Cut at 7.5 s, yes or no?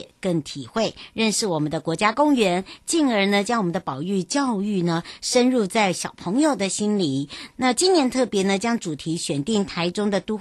yes